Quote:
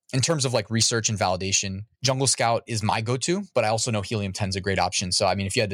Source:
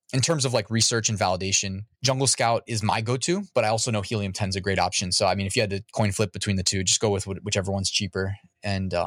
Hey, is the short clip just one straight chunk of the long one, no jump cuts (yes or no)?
yes